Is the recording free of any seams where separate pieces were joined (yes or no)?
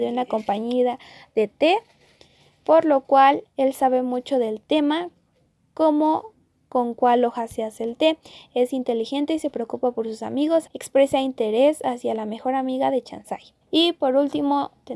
no